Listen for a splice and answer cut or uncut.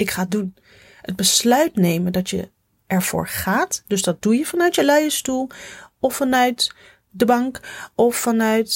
uncut